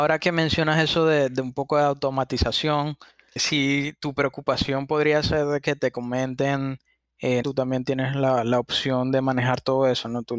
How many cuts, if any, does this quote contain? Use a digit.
1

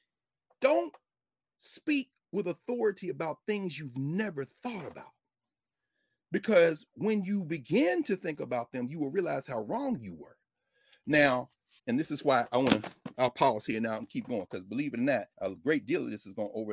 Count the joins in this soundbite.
2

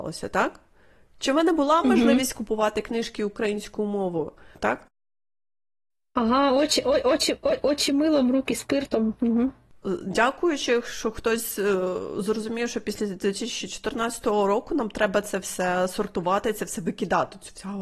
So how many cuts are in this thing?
1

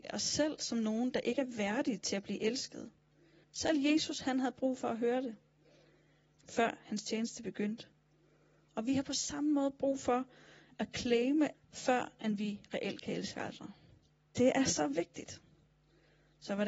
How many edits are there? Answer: 3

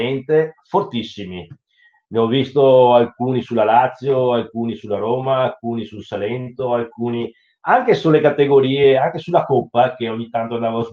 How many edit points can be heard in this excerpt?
0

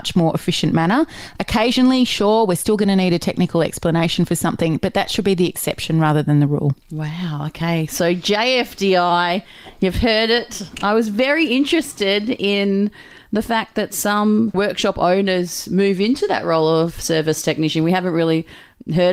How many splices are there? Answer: 1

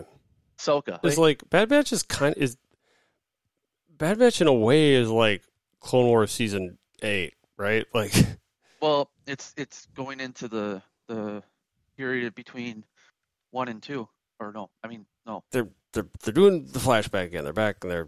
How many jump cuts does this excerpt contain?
2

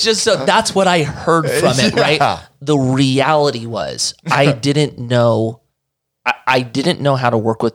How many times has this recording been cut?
0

